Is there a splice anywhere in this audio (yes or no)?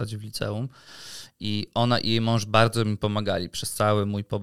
no